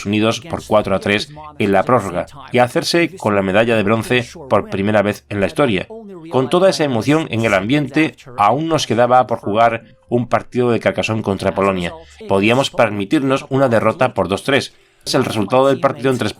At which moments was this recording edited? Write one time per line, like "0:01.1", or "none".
0:12.2
0:15.1